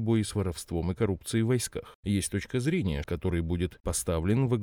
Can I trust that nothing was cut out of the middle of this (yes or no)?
no